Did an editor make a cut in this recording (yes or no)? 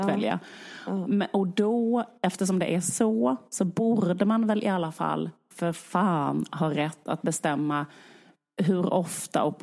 no